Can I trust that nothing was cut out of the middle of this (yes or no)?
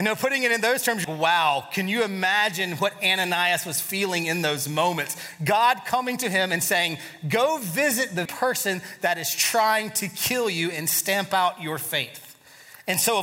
no